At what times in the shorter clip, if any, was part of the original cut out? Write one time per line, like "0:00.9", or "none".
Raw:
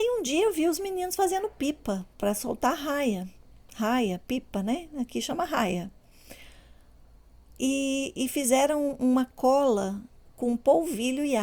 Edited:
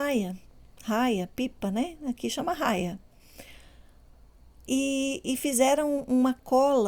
none